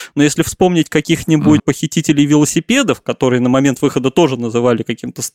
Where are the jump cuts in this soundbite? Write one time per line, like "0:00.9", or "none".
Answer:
0:01.6